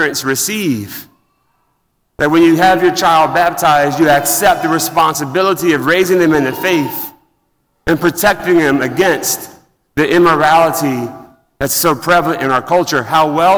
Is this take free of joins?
yes; 0 cuts

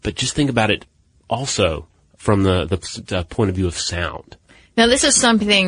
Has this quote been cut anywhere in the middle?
no; 0 cuts

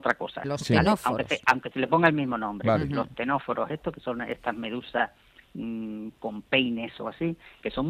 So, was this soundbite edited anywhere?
no; 0 cuts

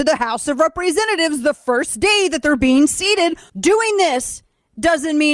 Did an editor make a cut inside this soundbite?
yes; 1 cut; at 3.5 s

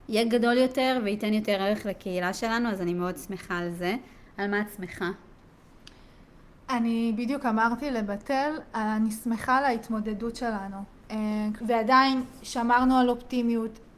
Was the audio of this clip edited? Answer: yes; 1 cut; at 11.6 s

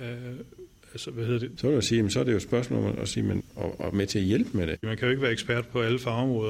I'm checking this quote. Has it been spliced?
yes; 3 cuts; at 1.6 s, 3.4 s, 4.8 s

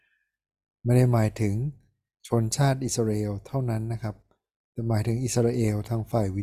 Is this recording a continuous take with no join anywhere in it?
yes; 0 cuts

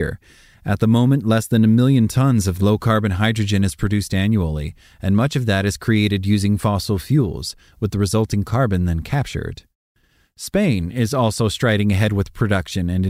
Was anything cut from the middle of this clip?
no; 0 cuts

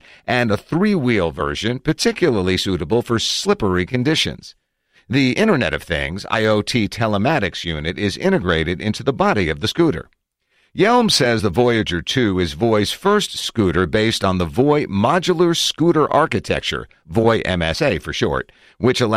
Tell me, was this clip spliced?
yes; 1 cut; at 5.0 s

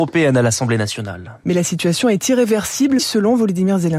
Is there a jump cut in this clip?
yes; 2 cuts; at 1.4 s, 3.0 s

